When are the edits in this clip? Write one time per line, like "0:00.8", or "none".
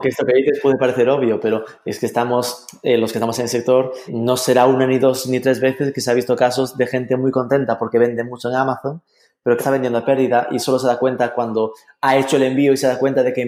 0:04.1
0:09.6